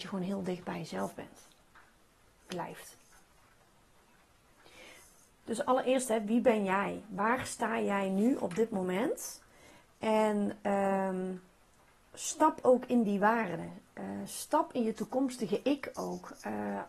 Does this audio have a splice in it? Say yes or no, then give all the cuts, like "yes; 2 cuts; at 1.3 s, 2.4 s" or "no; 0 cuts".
no; 0 cuts